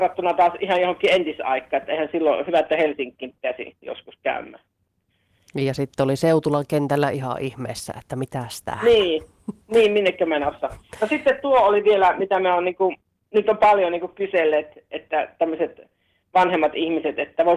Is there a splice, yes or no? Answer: no